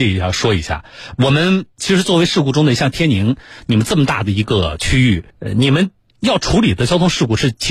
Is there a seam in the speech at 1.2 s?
no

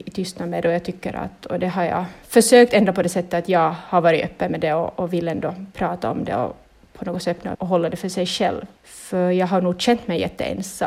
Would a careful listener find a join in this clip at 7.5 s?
yes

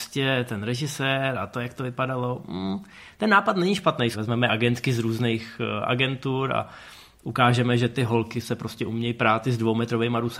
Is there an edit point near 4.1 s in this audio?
yes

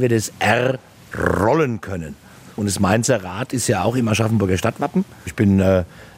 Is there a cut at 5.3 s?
yes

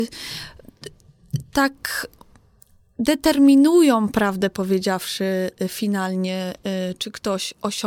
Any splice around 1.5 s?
no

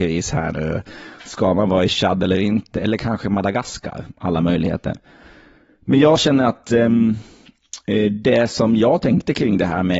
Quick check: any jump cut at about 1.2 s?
no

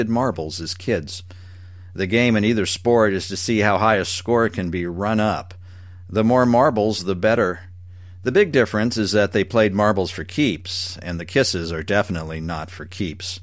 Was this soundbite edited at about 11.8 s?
no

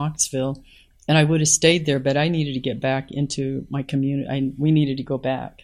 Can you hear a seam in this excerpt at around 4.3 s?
no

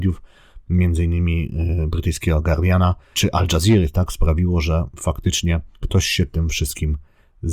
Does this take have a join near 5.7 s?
yes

